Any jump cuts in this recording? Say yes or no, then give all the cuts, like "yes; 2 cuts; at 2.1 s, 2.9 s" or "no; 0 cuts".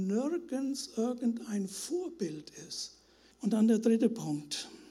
yes; 1 cut; at 3.3 s